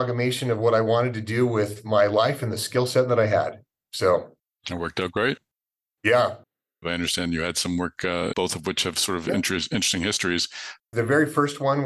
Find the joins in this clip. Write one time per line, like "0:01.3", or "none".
0:06.8
0:08.3
0:10.8